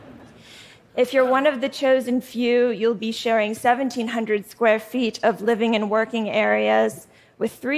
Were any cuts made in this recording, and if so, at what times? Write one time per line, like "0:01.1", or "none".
none